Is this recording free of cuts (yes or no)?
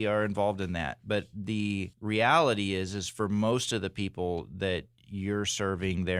no